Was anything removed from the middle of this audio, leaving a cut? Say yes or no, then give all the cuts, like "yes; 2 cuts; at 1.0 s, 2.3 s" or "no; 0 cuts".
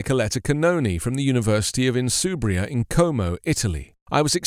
no; 0 cuts